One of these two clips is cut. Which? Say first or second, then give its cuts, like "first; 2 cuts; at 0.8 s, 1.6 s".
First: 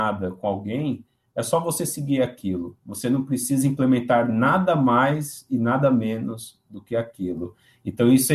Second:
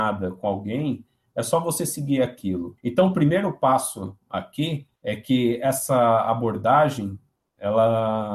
second; 2 cuts; at 2.8 s, 5.0 s